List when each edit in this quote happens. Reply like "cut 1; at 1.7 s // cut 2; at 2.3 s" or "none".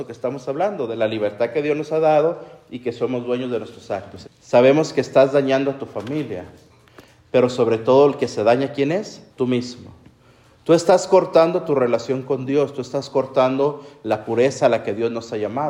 cut 1; at 4.2 s // cut 2; at 9.3 s